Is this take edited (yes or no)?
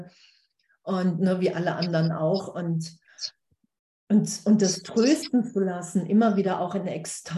no